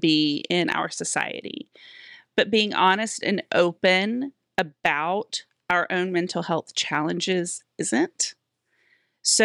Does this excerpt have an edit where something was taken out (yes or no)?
no